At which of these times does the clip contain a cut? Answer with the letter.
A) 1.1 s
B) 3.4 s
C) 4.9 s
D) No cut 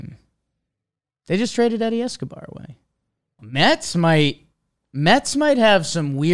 B